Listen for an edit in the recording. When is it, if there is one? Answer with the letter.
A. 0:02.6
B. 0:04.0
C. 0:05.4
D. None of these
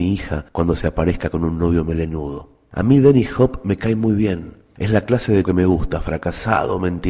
C